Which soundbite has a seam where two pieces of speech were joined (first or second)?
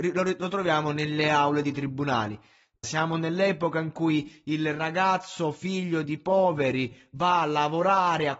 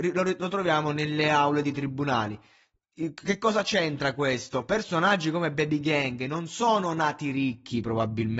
first